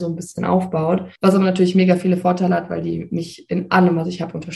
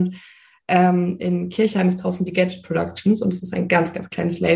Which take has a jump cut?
first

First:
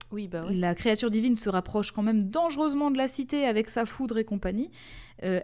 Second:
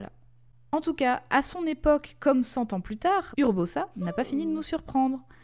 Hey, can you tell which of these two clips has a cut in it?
second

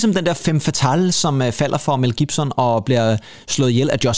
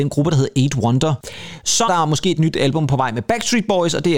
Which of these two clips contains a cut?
second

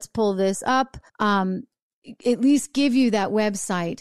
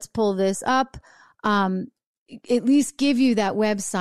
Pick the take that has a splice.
first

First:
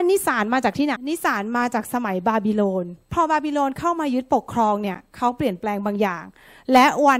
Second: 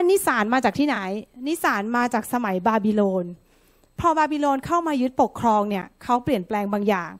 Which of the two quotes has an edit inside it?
first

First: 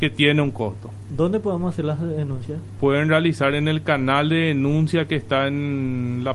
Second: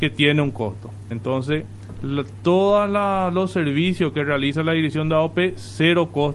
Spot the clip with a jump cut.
second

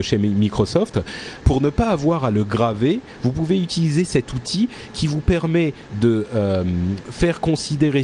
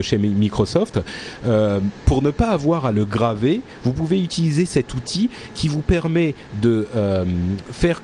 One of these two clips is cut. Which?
first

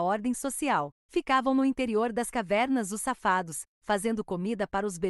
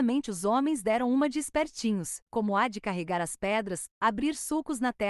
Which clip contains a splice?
second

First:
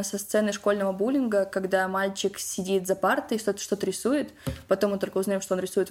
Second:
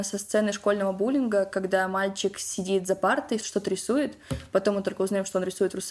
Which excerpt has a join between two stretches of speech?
second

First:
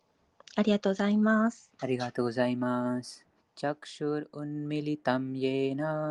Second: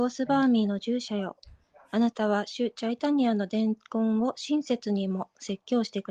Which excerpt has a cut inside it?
first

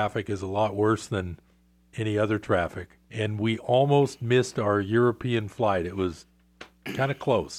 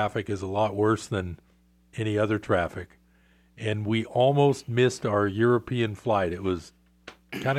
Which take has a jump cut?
first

